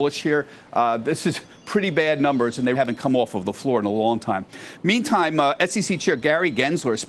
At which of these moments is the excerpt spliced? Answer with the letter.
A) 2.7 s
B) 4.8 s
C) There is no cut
A